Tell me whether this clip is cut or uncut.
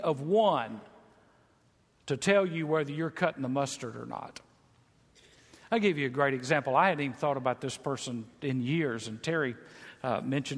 uncut